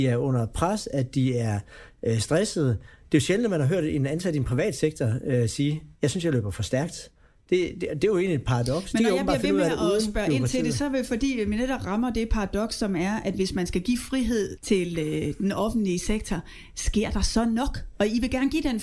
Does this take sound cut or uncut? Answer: cut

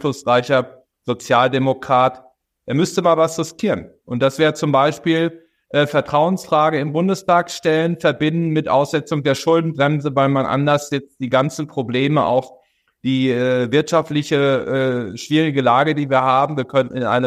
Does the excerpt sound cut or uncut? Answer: uncut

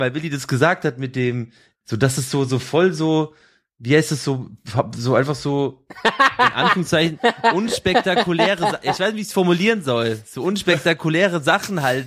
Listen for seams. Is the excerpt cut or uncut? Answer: cut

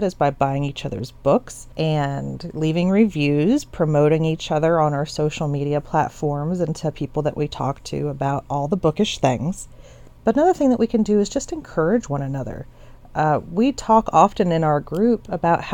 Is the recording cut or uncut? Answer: cut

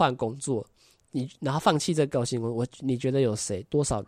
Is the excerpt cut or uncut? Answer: uncut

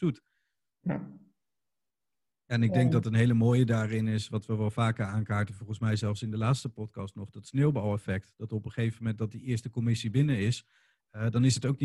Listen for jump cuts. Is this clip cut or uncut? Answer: uncut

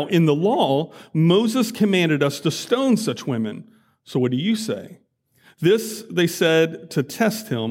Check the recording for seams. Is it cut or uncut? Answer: uncut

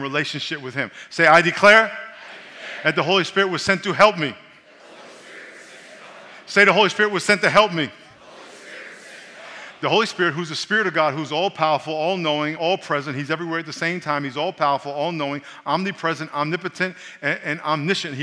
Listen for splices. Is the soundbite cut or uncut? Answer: uncut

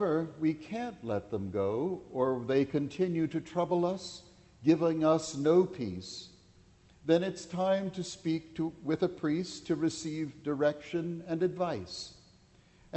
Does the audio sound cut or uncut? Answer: uncut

